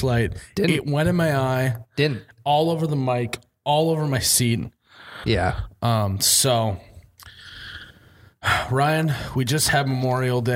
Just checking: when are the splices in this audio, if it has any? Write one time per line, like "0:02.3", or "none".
0:05.2